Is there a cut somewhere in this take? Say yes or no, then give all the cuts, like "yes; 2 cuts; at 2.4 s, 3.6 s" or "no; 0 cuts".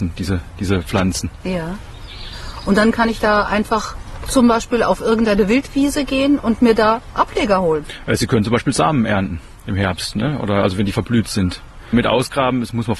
no; 0 cuts